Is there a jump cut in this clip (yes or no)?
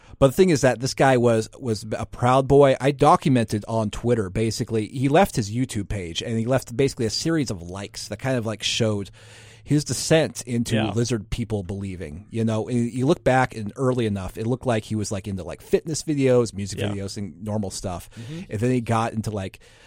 no